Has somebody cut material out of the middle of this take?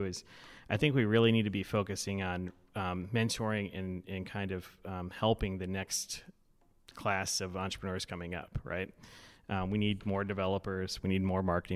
no; 0 cuts

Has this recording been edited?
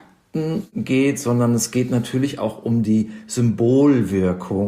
no; 0 cuts

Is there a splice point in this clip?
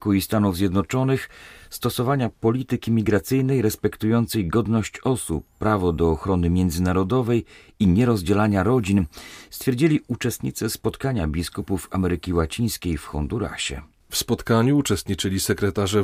no; 0 cuts

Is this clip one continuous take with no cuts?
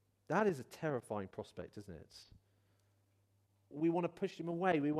no; 1 cut; at 3.7 s

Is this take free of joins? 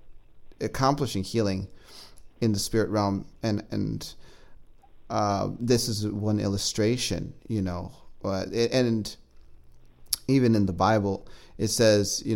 yes; 0 cuts

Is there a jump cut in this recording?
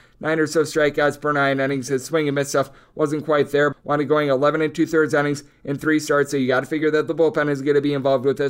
yes; 1 cut; at 3.7 s

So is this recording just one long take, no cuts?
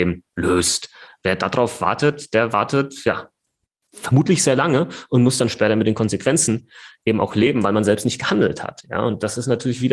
yes; 0 cuts

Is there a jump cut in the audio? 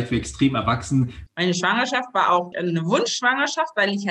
yes; 2 cuts; at 1.3 s, 2.5 s

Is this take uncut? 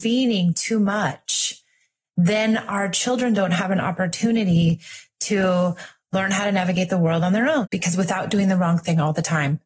no; 1 cut; at 7.6 s

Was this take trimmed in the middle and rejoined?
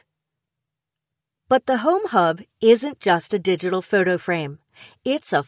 no; 0 cuts

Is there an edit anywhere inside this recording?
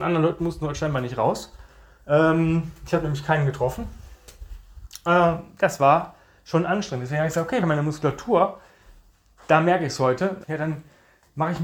yes; 2 cuts; at 7.6 s, 10.4 s

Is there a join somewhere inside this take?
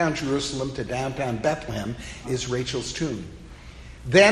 yes; 1 cut; at 2.2 s

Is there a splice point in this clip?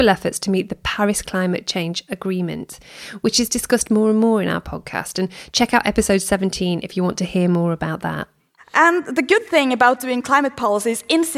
no; 0 cuts

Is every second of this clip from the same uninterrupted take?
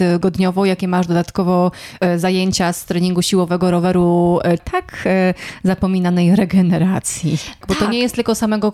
no; 3 cuts; at 2.0 s, 4.6 s, 7.6 s

